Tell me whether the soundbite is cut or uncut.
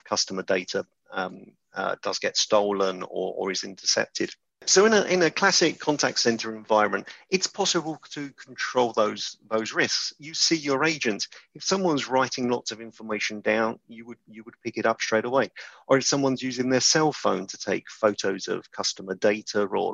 uncut